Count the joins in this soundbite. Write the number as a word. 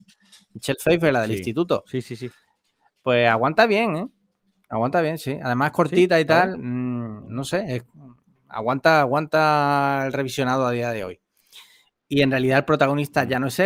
one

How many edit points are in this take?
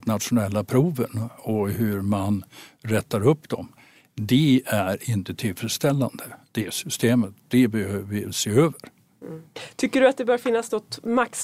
one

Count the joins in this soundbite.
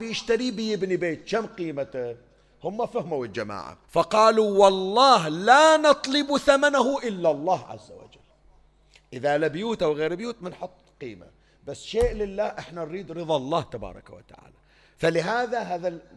one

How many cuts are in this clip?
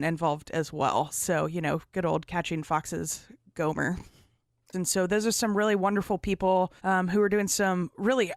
two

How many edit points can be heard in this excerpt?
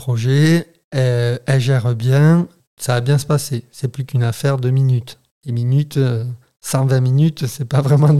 zero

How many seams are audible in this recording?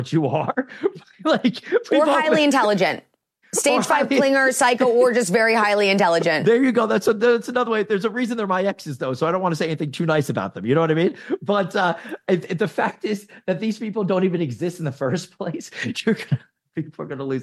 zero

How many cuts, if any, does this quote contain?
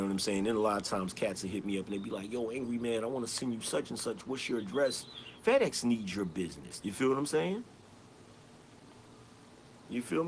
two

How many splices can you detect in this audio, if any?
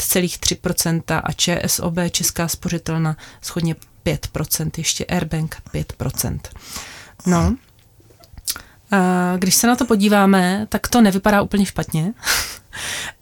zero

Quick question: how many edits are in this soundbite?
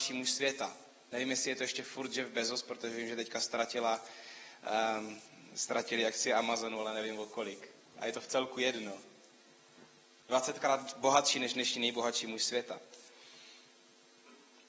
zero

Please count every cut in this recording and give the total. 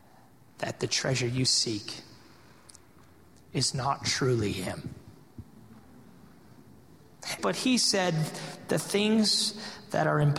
one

